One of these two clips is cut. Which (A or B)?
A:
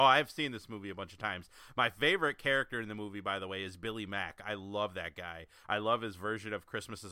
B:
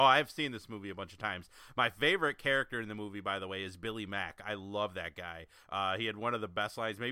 B